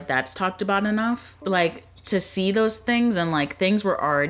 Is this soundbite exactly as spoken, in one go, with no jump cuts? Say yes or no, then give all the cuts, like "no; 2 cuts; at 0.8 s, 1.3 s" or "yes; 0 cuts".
no; 1 cut; at 1.4 s